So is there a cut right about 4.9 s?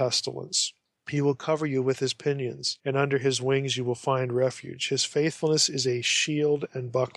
no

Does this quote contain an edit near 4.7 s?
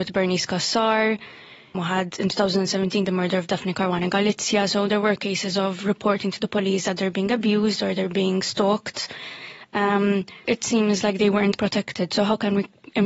no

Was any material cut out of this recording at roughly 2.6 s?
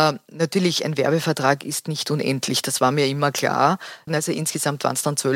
no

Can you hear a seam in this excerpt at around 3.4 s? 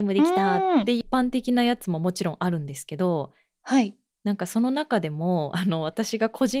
no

